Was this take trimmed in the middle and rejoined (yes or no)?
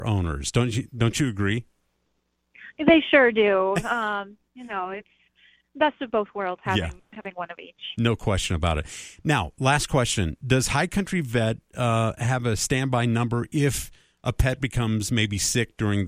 no